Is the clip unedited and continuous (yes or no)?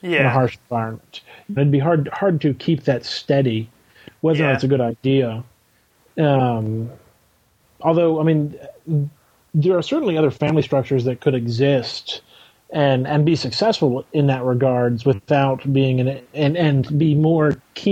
no